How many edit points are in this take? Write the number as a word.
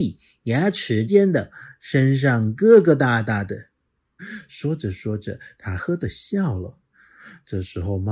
three